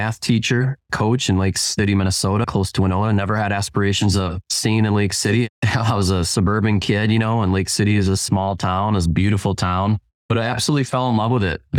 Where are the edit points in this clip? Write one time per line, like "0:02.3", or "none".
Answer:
0:02.4